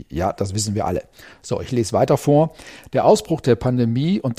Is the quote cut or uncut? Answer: uncut